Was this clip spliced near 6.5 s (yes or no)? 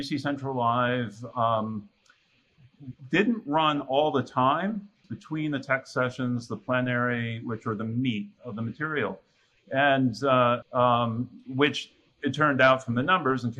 no